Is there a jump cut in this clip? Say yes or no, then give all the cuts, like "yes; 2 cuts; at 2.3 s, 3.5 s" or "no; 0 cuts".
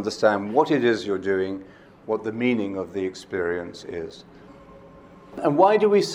no; 0 cuts